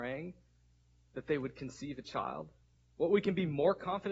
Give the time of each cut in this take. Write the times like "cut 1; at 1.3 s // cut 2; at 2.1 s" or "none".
cut 1; at 2.8 s

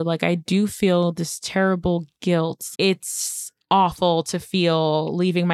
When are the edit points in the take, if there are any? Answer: cut 1; at 2.8 s

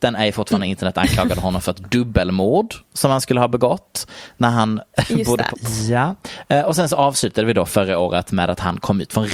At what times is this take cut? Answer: cut 1; at 5.5 s

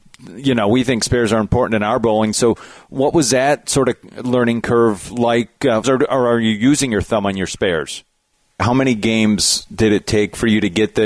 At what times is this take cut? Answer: cut 1; at 2.3 s // cut 2; at 5.8 s // cut 3; at 8.6 s

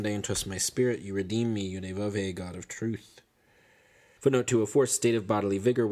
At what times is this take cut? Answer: cut 1; at 4.2 s

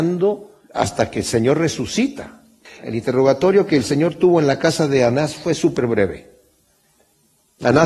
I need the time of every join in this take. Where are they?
cut 1; at 2.7 s

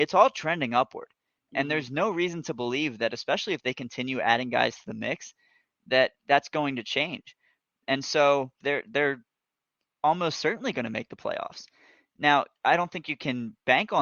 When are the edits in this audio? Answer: cut 1; at 8.6 s

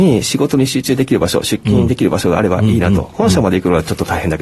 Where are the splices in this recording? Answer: none

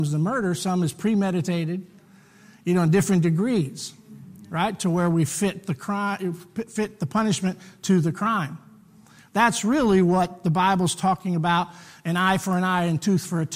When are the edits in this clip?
none

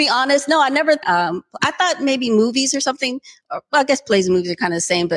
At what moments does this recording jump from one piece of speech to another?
cut 1; at 1.0 s

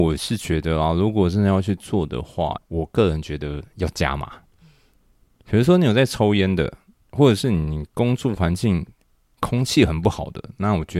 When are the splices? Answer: cut 1; at 2.6 s

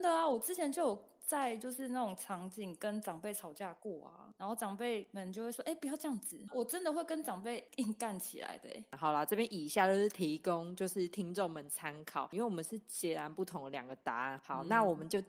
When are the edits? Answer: none

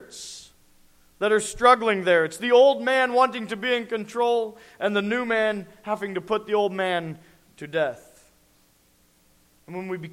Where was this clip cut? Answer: none

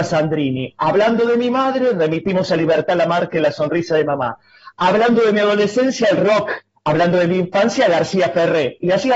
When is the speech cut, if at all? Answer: none

